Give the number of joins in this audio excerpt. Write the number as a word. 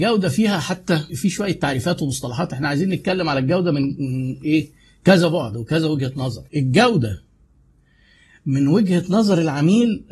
two